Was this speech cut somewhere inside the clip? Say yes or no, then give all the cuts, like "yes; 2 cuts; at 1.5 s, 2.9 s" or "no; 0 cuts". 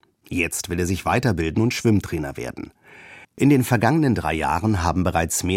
yes; 1 cut; at 3.2 s